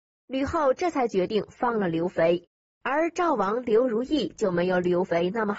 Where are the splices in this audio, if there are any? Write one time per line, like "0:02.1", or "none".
none